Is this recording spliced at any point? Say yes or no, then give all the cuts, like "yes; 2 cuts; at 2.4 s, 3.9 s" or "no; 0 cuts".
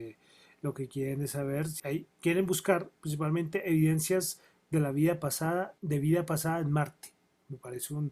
yes; 2 cuts; at 1.8 s, 5.8 s